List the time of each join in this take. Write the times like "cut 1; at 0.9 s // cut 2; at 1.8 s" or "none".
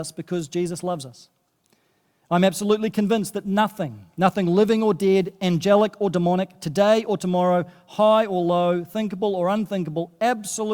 none